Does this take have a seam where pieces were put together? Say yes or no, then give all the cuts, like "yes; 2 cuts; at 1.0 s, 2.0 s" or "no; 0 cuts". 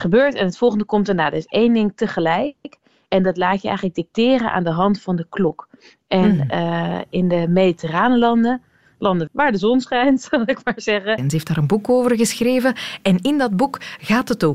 yes; 2 cuts; at 9.3 s, 11.2 s